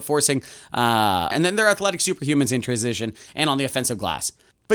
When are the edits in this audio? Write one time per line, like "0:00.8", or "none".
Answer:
0:01.3